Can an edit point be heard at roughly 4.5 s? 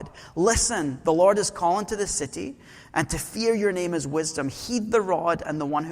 no; 0 cuts

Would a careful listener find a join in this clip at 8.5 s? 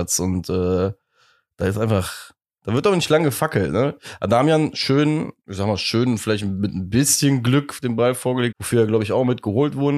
yes; 2 cuts; at 5.4 s, 8.5 s

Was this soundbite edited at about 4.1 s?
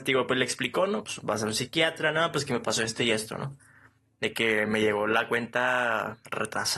no; 1 cut; at 1.0 s

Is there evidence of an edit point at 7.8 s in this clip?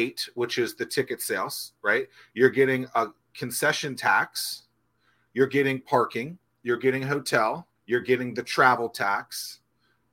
yes; 1 cut; at 7.8 s

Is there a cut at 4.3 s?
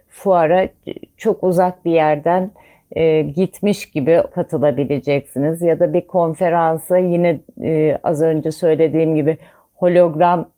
yes; 1 cut; at 4.3 s

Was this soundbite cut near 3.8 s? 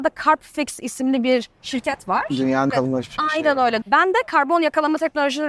yes; 2 cuts; at 2.7 s, 3.8 s

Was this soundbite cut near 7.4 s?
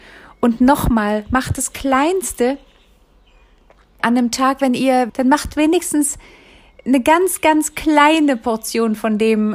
no; 2 cuts; at 4.0 s, 5.1 s

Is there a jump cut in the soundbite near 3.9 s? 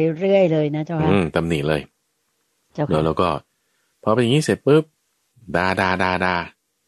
no; 0 cuts

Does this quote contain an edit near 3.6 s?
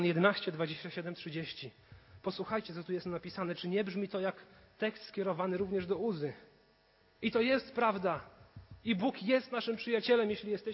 no; 1 cut; at 7.0 s

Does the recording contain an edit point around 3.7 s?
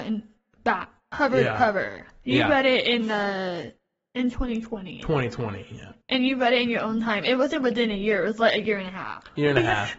no; 0 cuts

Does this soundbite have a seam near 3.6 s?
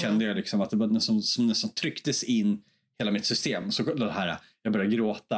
no; 0 cuts

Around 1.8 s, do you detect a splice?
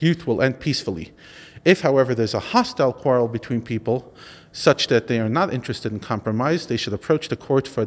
no; 0 cuts

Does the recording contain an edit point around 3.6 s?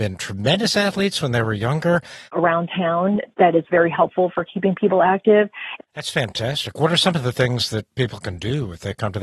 no; 2 cuts; at 2.3 s, 5.8 s

